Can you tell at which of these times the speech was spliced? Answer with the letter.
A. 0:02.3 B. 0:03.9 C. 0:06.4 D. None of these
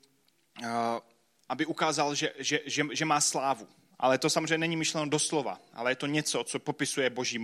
B